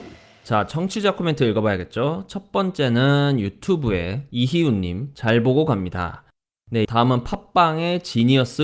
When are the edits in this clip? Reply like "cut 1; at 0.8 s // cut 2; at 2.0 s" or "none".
cut 1; at 6.8 s